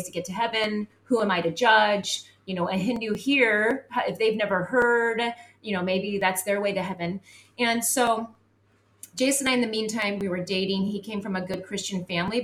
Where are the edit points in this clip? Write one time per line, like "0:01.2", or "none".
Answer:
none